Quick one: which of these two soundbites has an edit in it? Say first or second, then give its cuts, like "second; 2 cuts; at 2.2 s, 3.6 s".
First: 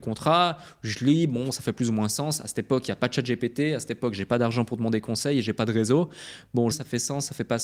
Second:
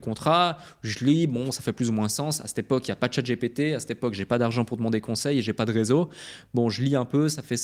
first; 1 cut; at 6.7 s